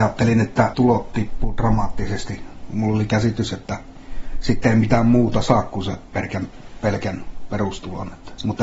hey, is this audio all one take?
yes; 0 cuts

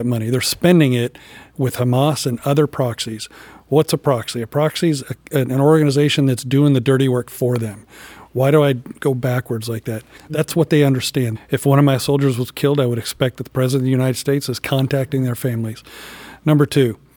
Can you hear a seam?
yes; 2 cuts; at 10.2 s, 11.3 s

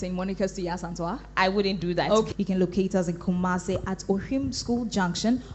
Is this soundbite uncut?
no; 1 cut; at 2.3 s

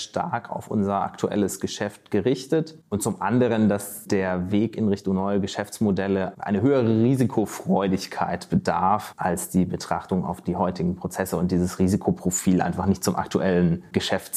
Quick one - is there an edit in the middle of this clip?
no; 0 cuts

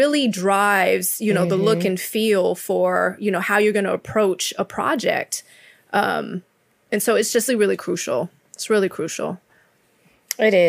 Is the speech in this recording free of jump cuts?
no; 1 cut; at 7.5 s

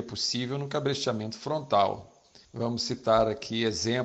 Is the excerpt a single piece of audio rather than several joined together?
no; 1 cut; at 2.4 s

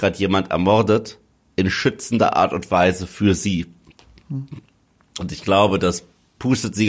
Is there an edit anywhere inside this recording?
no; 0 cuts

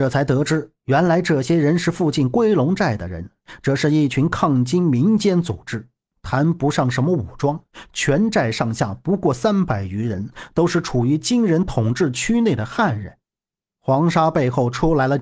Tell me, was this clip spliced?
yes; 1 cut; at 13.6 s

